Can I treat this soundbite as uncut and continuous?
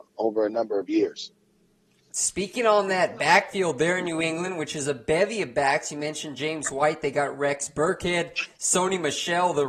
yes; 0 cuts

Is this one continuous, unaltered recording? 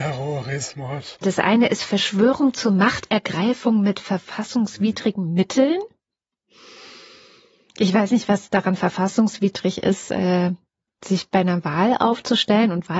no; 1 cut; at 1.2 s

